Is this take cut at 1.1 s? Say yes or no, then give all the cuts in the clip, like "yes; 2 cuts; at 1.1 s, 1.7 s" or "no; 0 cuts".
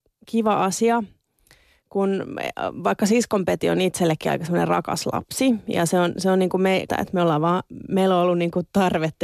no; 1 cut; at 6.9 s